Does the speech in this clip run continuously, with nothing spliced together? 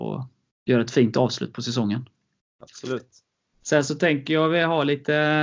yes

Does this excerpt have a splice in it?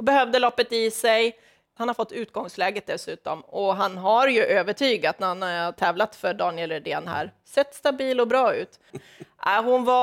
yes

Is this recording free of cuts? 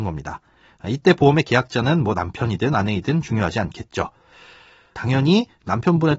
no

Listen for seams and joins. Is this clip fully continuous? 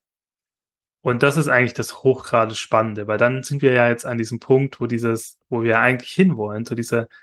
yes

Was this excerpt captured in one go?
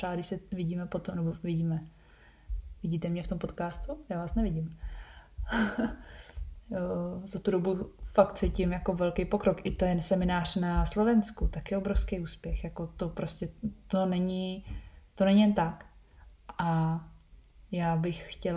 yes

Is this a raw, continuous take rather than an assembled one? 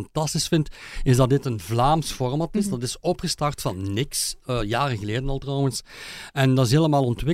yes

